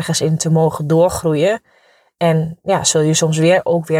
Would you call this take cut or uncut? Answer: uncut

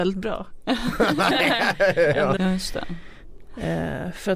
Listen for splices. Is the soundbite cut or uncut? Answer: cut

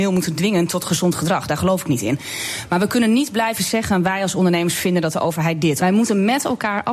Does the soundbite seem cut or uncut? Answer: cut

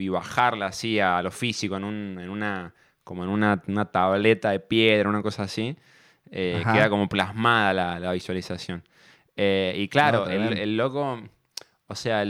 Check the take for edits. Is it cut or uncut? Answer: uncut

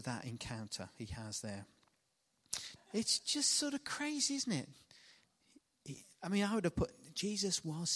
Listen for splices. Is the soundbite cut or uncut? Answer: cut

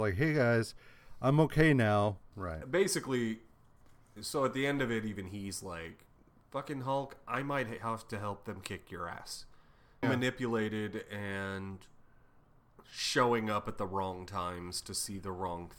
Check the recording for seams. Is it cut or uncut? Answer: cut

